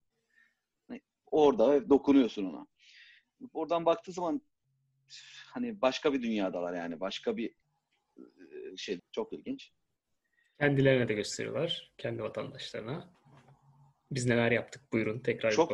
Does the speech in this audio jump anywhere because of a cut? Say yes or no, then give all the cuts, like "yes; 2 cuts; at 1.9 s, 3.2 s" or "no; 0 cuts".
yes; 1 cut; at 9.0 s